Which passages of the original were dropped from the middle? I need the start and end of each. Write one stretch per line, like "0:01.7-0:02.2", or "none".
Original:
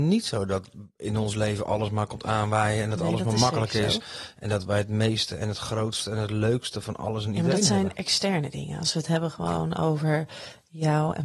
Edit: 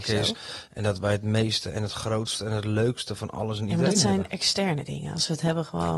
none